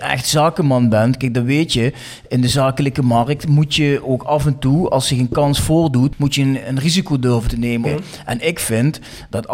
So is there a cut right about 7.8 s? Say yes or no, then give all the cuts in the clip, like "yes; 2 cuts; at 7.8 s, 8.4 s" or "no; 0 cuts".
yes; 1 cut; at 7.8 s